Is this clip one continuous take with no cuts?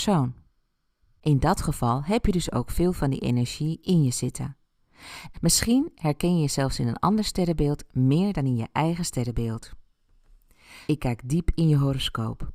no; 3 cuts; at 1.2 s, 5.3 s, 10.9 s

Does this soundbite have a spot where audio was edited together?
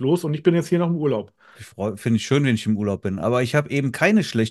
yes; 1 cut; at 1.5 s

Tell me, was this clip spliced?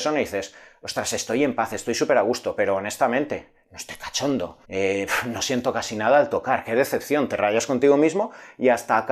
yes; 1 cut; at 4.6 s

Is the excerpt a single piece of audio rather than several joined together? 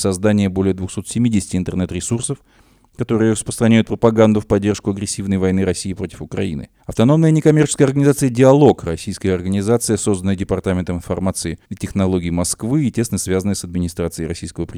no; 2 cuts; at 6.8 s, 11.6 s

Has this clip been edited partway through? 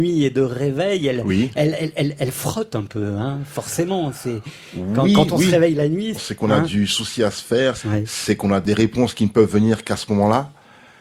yes; 2 cuts; at 6.1 s, 7.8 s

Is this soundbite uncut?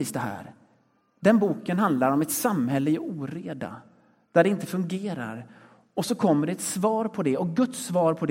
yes; 0 cuts

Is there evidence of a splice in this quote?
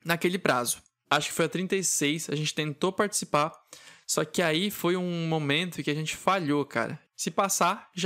yes; 2 cuts; at 1.0 s, 7.0 s

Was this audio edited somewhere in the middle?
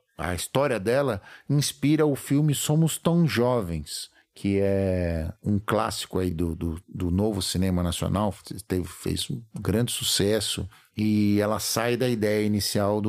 no; 0 cuts

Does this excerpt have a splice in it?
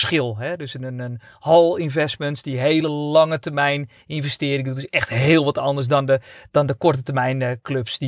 no; 0 cuts

